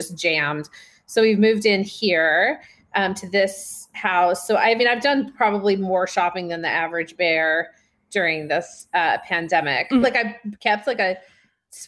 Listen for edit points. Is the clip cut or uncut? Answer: cut